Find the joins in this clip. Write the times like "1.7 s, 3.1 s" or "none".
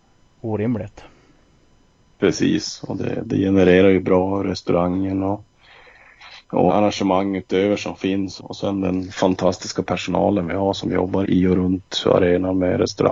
6.7 s, 8.4 s, 11.2 s